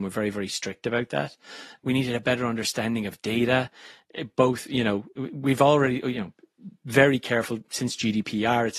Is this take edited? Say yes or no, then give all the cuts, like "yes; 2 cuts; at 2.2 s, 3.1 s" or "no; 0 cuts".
yes; 1 cut; at 1.8 s